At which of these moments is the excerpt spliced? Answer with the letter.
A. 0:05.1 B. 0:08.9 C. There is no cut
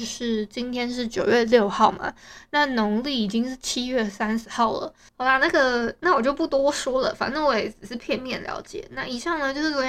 A